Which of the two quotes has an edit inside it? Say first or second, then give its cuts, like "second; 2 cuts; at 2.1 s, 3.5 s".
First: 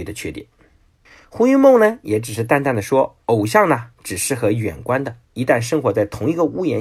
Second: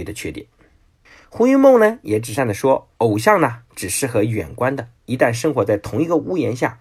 second; 1 cut; at 2.4 s